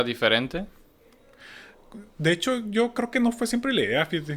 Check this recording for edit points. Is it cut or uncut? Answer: uncut